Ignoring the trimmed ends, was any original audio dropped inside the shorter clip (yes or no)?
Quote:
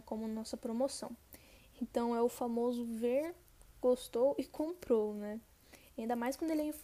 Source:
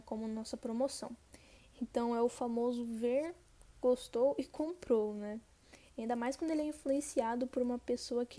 no